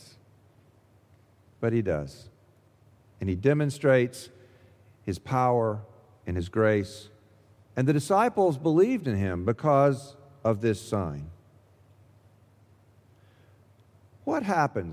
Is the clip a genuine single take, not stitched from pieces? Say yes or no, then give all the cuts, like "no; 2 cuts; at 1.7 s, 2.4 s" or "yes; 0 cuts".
yes; 0 cuts